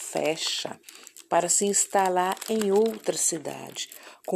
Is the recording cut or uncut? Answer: uncut